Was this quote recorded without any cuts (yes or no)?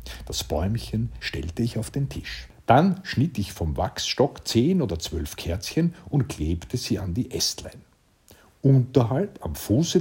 no